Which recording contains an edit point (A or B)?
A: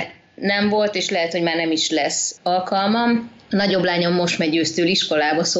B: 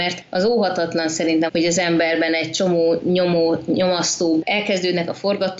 B